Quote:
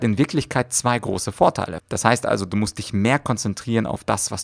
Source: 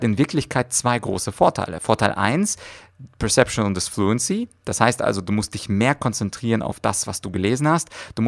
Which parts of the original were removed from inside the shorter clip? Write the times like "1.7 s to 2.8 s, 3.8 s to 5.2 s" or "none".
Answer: 1.8 s to 4.6 s

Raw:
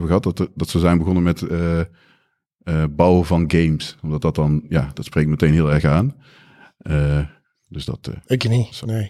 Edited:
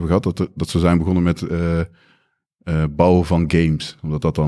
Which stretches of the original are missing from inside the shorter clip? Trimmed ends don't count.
none

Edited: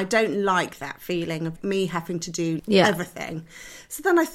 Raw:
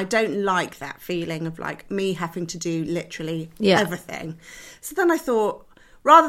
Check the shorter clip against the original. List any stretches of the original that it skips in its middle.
1.6 s to 1.8 s, 2.9 s to 3.5 s

